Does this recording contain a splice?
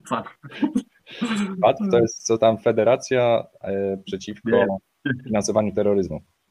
no; 0 cuts

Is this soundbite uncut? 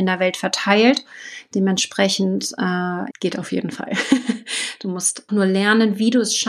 no; 2 cuts; at 3.1 s, 5.3 s

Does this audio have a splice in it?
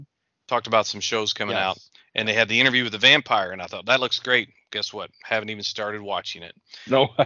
no; 0 cuts

